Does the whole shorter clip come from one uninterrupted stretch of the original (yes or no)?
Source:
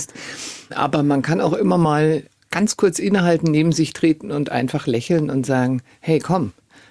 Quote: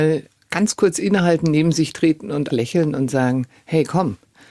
no